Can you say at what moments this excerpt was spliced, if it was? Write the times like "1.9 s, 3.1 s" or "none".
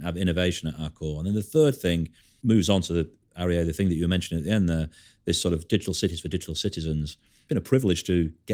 none

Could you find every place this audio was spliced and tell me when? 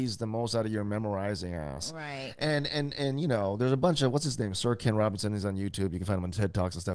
none

